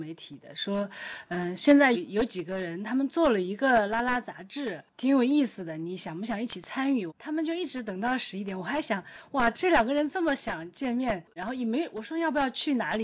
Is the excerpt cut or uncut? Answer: cut